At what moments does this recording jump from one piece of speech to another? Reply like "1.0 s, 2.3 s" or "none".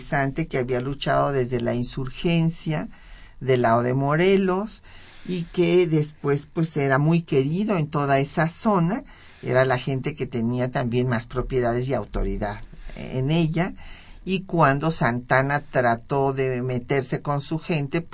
none